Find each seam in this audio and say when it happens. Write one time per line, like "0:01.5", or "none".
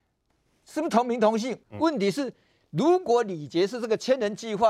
0:01.6